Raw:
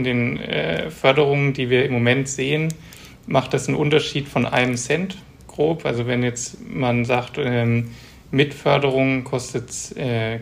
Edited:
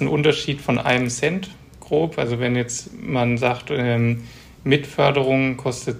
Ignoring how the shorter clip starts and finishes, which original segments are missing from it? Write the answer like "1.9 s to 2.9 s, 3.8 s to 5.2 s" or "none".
none